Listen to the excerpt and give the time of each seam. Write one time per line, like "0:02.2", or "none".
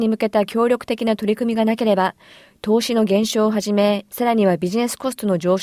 0:04.1

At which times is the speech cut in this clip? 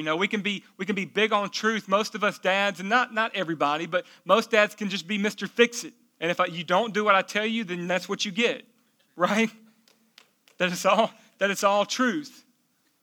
0:06.2

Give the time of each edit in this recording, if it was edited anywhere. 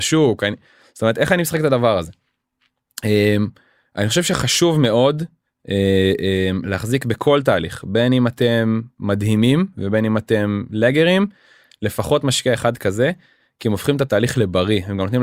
none

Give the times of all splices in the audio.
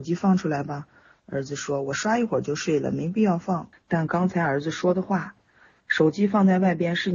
0:03.7

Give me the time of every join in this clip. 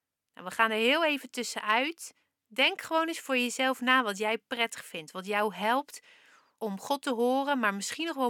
none

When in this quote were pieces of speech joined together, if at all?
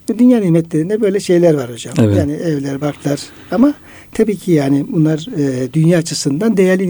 none

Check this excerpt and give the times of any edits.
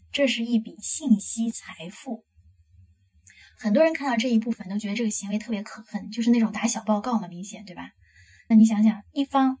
0:08.5

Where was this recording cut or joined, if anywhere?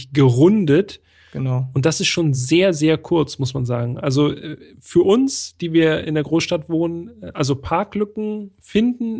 none

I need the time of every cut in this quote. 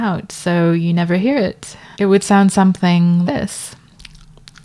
0:01.9
0:03.2

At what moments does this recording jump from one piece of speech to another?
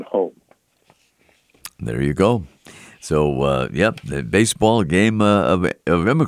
none

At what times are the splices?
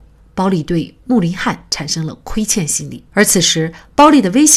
0:03.1

